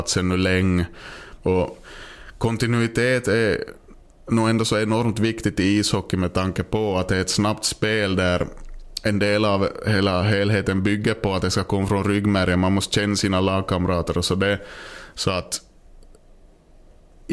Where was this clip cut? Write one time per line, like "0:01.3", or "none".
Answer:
0:01.4